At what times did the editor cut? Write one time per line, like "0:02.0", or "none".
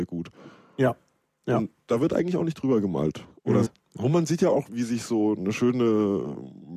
0:03.6
0:04.7